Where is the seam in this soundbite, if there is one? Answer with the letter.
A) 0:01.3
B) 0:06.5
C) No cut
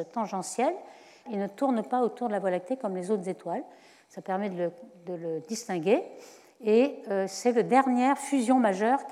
A